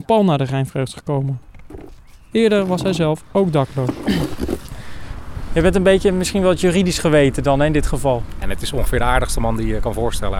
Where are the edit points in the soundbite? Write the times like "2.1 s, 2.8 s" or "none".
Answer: 8.4 s